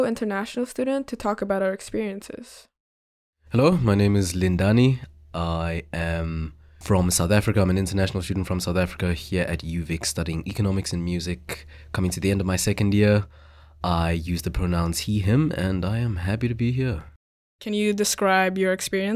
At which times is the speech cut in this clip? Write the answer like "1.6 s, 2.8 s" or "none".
none